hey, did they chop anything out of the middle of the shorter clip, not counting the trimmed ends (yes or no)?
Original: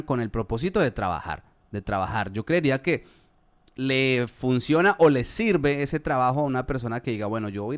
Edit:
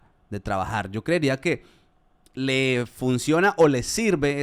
no